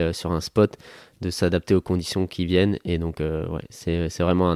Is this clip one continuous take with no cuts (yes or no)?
yes